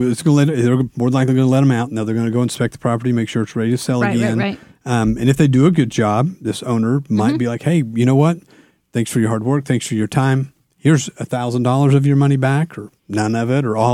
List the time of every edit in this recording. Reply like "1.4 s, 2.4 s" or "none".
13.0 s